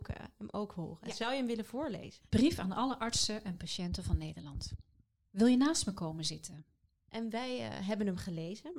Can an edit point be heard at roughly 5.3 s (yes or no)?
no